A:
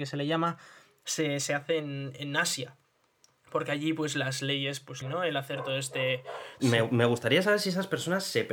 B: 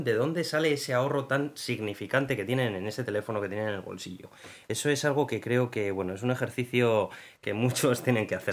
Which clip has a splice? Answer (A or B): A